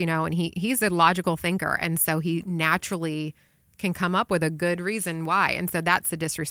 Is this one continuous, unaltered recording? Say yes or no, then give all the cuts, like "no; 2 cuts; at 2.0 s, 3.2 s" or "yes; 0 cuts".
yes; 0 cuts